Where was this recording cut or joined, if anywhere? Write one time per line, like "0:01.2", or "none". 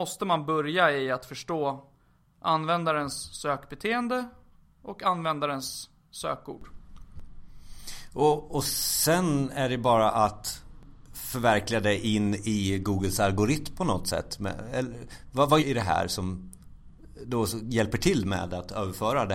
0:15.6